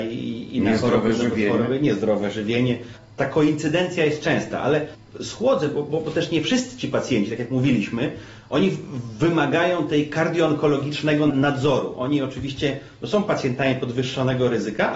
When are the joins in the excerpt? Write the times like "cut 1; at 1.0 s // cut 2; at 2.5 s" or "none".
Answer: none